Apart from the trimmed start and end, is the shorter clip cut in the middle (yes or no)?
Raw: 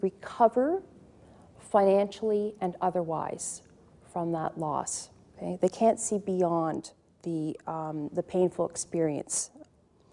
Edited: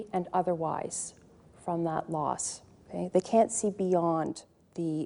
no